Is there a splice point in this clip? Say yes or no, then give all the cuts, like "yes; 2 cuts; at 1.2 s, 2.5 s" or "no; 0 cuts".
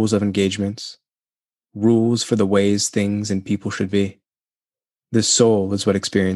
yes; 1 cut; at 5.0 s